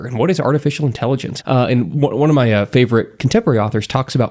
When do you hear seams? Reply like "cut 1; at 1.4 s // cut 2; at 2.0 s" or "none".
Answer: cut 1; at 1.4 s